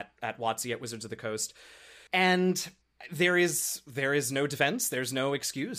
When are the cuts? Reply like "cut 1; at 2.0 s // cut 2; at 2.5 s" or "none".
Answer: cut 1; at 2.1 s